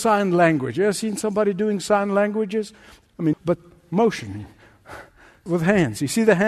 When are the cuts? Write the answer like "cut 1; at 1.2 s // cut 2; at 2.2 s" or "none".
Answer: cut 1; at 3.3 s